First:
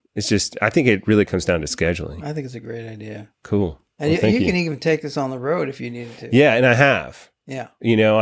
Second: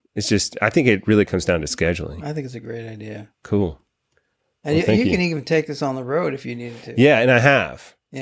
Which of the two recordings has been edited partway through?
first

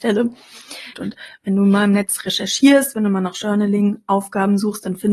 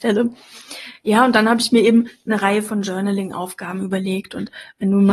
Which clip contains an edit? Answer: first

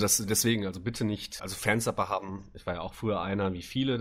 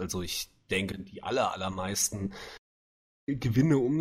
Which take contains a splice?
first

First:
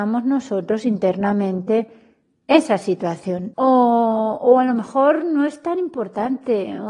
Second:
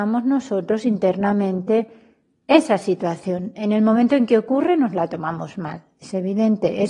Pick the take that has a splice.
first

